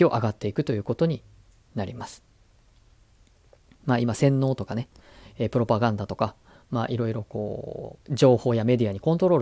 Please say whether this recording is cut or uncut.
cut